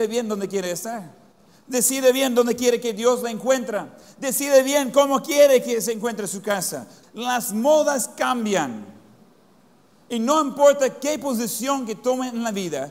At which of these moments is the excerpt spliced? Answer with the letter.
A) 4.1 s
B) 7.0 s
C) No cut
B